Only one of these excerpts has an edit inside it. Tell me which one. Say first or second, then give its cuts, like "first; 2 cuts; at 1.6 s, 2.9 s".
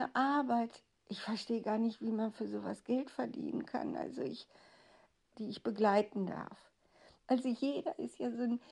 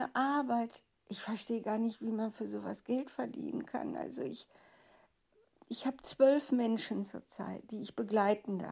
first; 2 cuts; at 5.3 s, 7.2 s